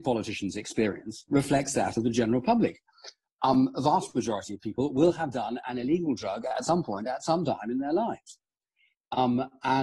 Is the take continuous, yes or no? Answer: yes